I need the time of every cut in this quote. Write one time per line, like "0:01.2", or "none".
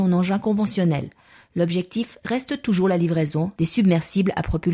0:03.6